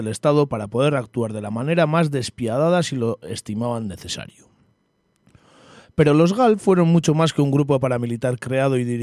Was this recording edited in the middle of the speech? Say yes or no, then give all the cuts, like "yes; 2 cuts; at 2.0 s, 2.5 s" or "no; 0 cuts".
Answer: no; 0 cuts